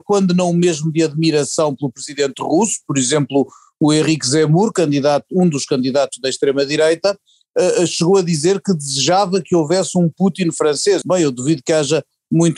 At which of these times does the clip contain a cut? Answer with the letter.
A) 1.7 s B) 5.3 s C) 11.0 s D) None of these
C